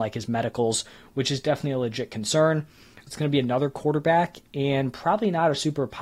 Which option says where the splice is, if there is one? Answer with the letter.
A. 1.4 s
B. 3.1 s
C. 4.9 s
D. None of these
B